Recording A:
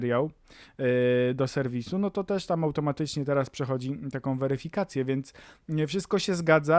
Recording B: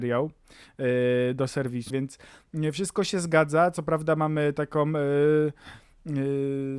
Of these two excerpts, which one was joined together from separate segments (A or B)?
B